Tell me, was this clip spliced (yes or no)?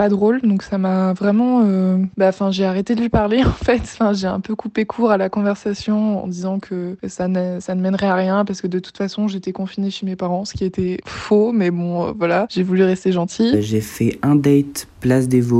no